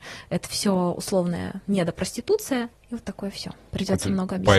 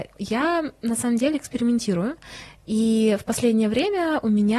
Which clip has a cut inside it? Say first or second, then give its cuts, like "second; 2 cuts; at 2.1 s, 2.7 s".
first; 1 cut; at 2.7 s